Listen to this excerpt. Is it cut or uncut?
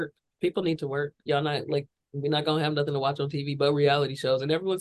cut